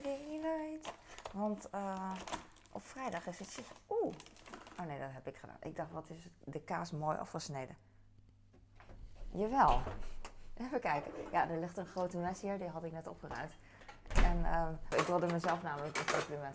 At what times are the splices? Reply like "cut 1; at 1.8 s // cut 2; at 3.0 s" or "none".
cut 1; at 14.9 s